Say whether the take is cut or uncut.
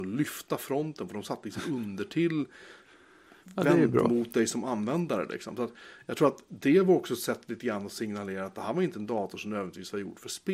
uncut